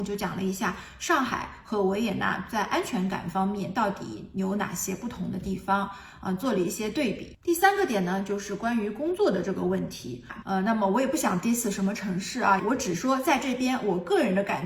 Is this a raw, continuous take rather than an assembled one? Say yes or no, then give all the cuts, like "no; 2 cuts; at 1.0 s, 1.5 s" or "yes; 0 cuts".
no; 2 cuts; at 10.4 s, 12.6 s